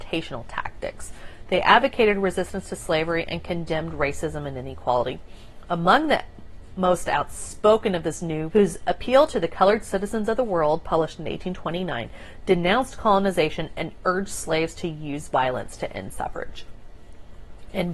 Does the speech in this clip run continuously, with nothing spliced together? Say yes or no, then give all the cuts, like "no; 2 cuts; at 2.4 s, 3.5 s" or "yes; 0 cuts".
no; 1 cut; at 8.5 s